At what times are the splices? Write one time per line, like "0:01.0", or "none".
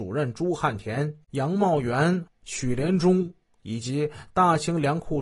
0:01.2
0:02.3